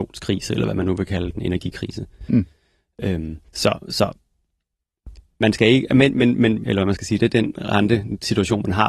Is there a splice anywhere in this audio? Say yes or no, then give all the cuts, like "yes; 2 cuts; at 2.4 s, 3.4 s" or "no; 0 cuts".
yes; 2 cuts; at 3.5 s, 6.6 s